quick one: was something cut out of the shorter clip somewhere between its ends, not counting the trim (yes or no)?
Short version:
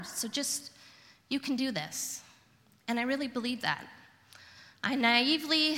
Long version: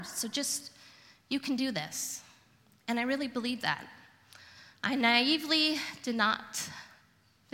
no